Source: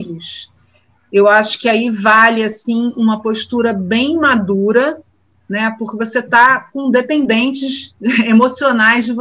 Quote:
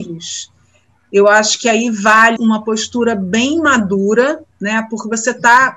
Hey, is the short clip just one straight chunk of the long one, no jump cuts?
no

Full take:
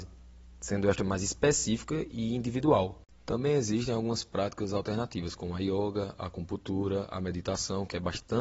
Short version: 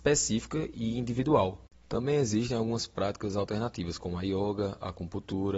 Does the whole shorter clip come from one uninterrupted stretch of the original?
yes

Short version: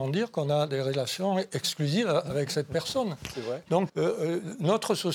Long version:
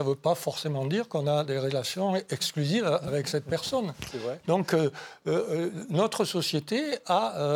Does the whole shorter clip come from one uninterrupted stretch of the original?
no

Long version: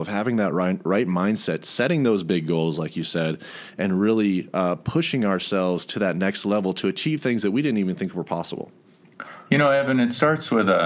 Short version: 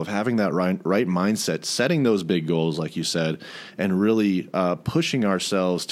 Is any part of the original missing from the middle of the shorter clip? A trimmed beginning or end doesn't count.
no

